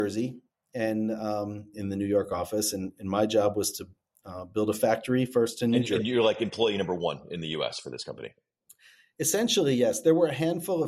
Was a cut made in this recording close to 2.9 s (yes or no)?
no